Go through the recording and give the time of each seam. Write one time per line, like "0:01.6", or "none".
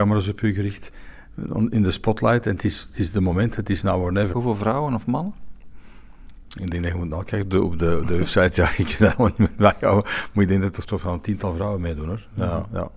0:04.3